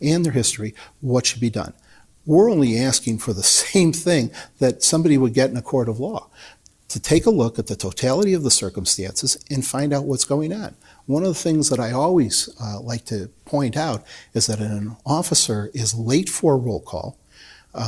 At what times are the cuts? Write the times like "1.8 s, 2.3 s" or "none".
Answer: none